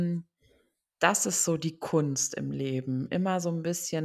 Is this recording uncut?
yes; 0 cuts

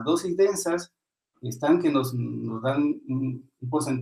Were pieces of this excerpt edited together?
no; 0 cuts

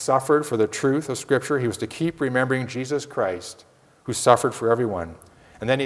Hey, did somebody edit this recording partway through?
no; 0 cuts

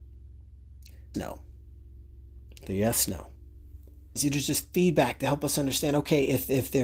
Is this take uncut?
no; 2 cuts; at 1.1 s, 4.2 s

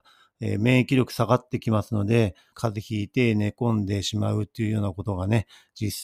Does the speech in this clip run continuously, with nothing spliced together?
no; 1 cut; at 2.5 s

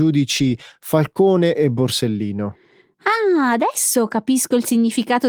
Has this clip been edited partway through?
no; 0 cuts

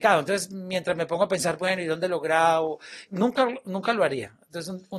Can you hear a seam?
yes; 1 cut; at 3.0 s

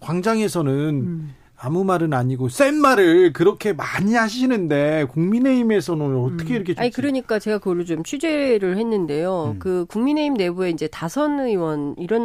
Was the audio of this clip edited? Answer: yes; 1 cut; at 6.8 s

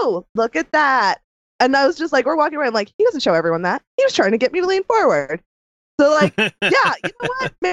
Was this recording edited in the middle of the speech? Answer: no; 0 cuts

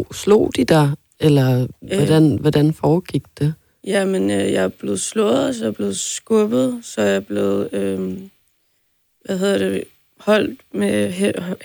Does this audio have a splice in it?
no; 0 cuts

